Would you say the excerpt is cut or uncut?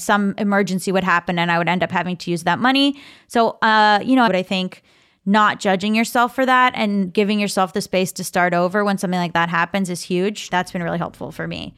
cut